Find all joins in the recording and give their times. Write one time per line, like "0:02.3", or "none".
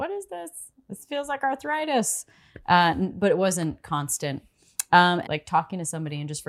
0:05.2